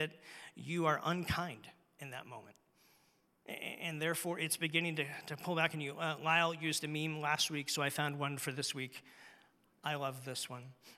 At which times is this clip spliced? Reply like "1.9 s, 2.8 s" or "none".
none